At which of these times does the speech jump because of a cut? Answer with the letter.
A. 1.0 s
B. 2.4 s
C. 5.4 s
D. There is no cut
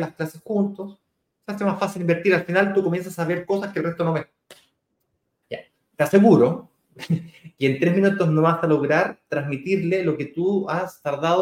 C